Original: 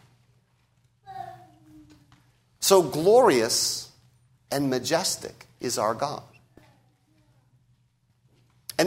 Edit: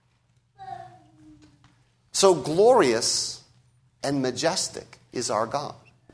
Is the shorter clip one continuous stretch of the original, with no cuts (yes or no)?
yes